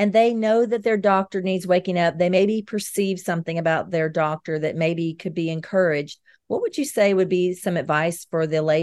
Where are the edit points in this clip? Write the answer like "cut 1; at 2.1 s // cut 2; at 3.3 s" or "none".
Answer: none